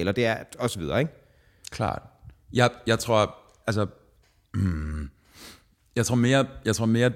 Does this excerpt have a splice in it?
no; 0 cuts

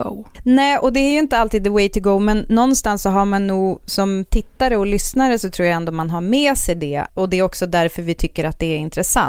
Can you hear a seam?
yes; 1 cut; at 7.1 s

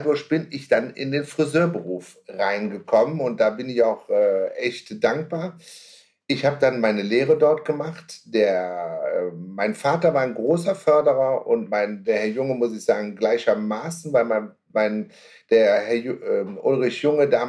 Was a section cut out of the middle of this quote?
no; 0 cuts

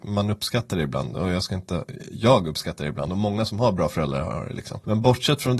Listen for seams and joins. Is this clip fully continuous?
yes; 0 cuts

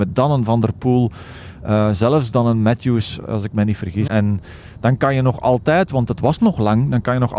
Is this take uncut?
no; 1 cut; at 4.1 s

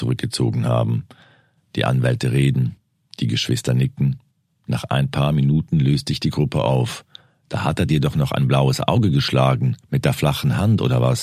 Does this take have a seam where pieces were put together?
yes; 1 cut; at 7.4 s

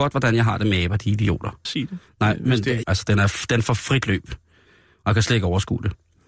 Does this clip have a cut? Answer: yes; 2 cuts; at 1.6 s, 2.8 s

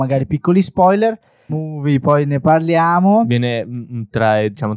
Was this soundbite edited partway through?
yes; 1 cut; at 1.5 s

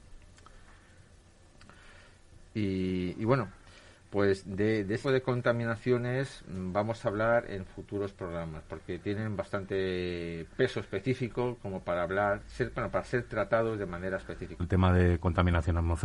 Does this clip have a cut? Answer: yes; 2 cuts; at 5.0 s, 14.6 s

